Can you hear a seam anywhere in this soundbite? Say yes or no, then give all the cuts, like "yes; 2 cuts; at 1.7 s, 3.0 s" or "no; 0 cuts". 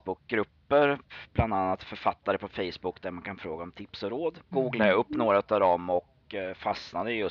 yes; 1 cut; at 4.5 s